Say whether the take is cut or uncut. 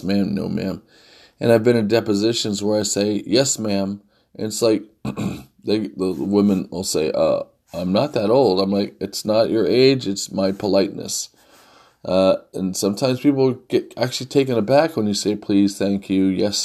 uncut